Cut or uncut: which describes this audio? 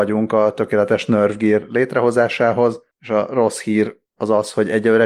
uncut